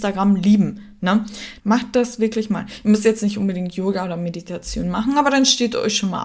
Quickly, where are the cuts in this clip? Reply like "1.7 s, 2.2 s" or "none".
1.6 s